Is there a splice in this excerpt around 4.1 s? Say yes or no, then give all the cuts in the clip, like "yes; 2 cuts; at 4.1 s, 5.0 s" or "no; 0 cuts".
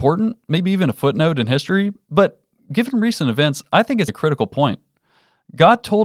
yes; 1 cut; at 4.1 s